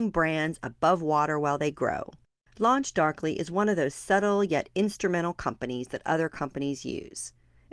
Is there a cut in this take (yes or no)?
no